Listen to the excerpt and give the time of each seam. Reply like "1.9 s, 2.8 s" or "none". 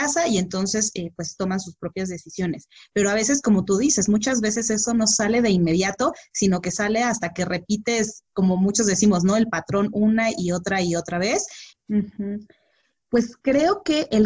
11.7 s